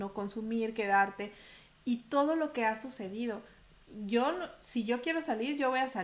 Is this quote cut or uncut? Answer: uncut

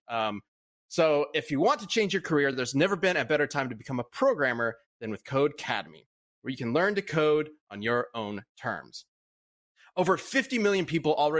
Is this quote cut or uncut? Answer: uncut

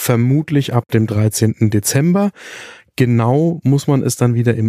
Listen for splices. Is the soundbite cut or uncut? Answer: uncut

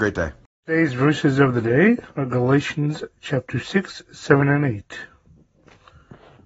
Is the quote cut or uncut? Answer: uncut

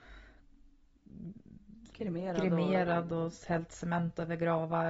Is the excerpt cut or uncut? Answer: uncut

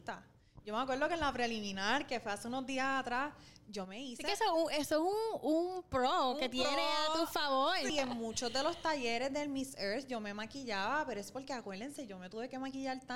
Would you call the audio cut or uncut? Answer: uncut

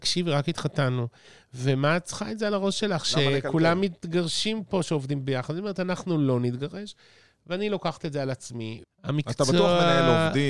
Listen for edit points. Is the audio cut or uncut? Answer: cut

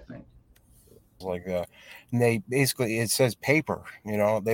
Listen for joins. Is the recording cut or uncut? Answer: cut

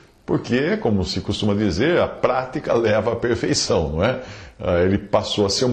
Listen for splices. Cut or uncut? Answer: uncut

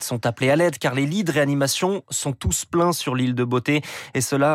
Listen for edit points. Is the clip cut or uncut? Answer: uncut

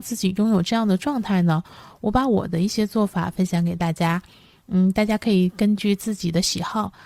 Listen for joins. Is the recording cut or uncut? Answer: uncut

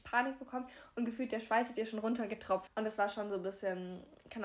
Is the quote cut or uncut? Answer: cut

